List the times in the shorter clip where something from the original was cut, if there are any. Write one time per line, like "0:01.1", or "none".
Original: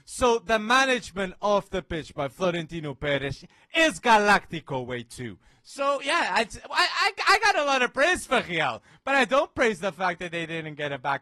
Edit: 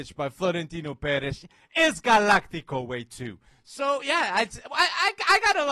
none